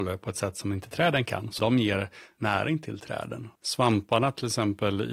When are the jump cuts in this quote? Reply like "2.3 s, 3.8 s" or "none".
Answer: 1.6 s, 3.6 s